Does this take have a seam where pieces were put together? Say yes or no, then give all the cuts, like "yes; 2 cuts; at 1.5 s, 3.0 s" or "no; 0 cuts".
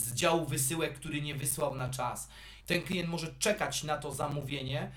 yes; 1 cut; at 2.6 s